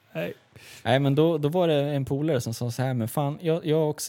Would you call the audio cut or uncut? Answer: uncut